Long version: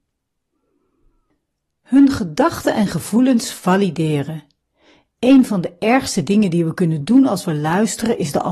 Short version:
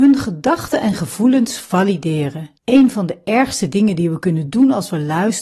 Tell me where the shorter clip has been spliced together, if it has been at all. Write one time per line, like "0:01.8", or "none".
0:02.6